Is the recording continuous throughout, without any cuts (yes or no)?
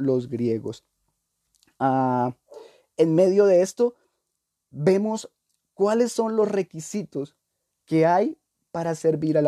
yes